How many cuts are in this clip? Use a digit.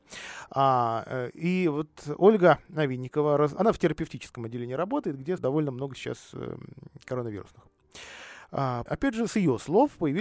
3